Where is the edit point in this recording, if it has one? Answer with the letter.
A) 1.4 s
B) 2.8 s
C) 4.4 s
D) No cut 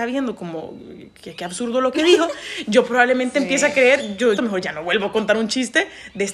C